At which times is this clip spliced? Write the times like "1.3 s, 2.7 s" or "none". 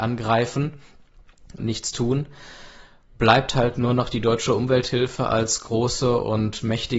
1.6 s